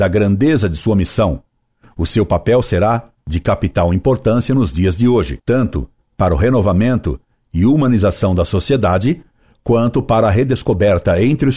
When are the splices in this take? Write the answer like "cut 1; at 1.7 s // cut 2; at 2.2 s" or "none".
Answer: none